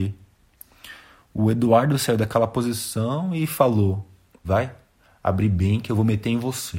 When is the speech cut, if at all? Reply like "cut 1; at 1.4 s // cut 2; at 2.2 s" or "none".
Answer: cut 1; at 4.4 s